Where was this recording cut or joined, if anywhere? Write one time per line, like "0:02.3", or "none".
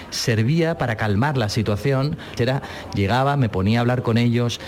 0:02.4